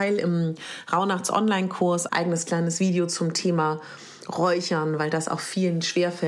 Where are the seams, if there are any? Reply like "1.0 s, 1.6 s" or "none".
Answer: 2.1 s